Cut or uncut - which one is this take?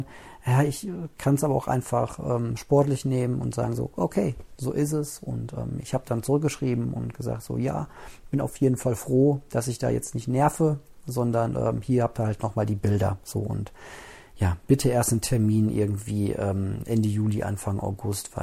uncut